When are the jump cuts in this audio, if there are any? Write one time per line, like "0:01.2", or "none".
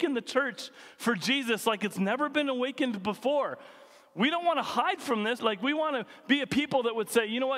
0:05.4